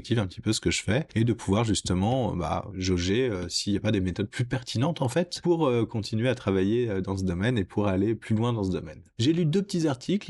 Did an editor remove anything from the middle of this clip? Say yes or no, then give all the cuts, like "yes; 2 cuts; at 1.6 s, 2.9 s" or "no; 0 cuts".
no; 0 cuts